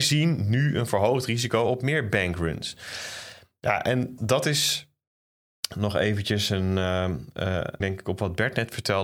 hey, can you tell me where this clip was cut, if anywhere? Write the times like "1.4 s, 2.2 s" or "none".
4.2 s, 7.8 s